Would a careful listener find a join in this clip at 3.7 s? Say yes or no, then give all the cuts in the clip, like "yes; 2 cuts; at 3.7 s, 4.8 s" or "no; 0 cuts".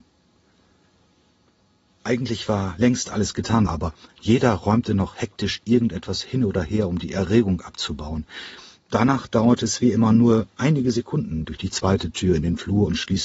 yes; 3 cuts; at 3.7 s, 8.8 s, 11.4 s